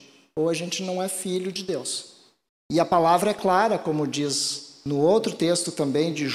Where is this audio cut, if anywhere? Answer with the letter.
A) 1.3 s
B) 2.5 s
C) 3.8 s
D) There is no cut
B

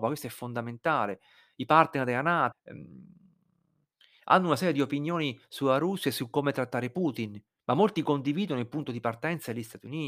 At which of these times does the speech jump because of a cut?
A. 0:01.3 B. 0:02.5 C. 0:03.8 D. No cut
B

